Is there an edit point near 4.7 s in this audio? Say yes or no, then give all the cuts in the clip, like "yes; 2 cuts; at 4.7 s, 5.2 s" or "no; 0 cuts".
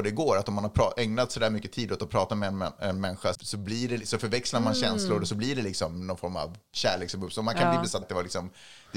no; 2 cuts; at 3.3 s, 8.0 s